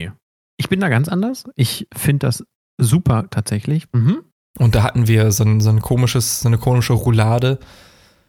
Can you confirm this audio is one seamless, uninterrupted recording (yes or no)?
no